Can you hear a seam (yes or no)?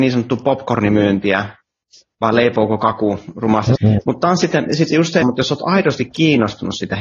yes